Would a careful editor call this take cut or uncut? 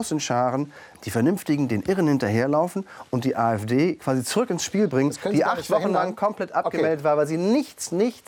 cut